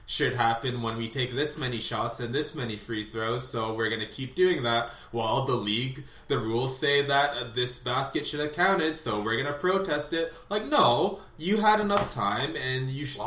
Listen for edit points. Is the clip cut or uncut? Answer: uncut